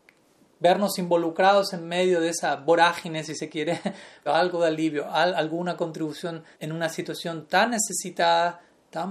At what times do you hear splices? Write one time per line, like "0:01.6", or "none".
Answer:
0:04.3
0:06.5